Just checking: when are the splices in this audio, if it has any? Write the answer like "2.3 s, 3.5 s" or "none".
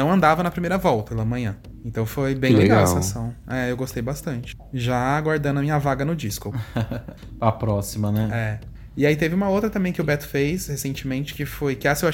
1.1 s